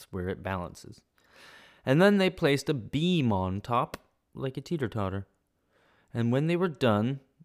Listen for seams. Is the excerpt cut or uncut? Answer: uncut